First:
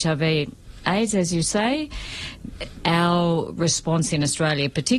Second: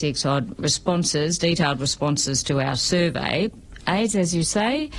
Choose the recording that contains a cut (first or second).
second